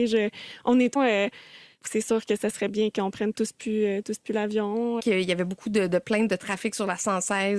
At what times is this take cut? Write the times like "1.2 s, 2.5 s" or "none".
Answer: 1.0 s, 5.0 s